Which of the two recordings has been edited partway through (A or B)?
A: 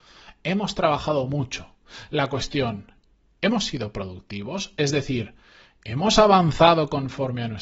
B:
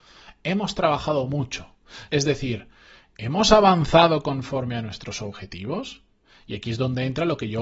B